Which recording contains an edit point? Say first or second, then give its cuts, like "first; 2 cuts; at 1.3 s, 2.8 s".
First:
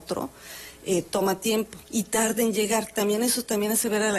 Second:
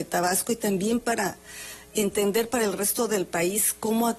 first; 1 cut; at 1.9 s